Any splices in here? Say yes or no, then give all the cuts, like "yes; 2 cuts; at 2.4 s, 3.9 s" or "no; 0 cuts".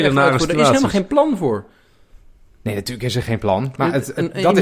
no; 0 cuts